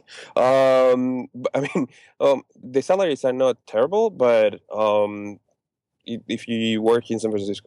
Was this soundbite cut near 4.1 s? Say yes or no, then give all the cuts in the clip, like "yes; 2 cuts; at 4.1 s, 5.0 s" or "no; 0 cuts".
no; 2 cuts; at 2.6 s, 6.0 s